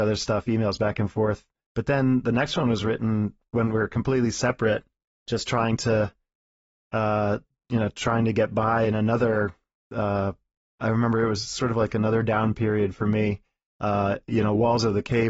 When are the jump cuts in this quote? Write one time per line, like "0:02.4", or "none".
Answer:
none